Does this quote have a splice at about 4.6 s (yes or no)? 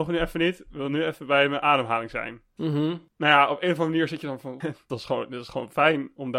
yes